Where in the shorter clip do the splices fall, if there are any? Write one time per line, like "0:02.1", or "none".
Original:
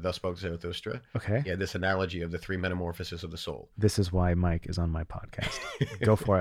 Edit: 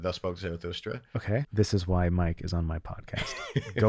0:01.4